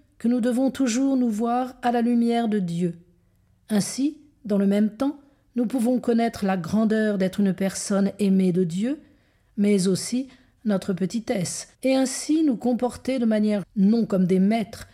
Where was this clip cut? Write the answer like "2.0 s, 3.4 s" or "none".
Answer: 11.7 s, 13.6 s